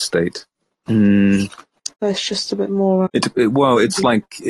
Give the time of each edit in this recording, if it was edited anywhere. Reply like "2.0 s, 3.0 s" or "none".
1.9 s, 3.1 s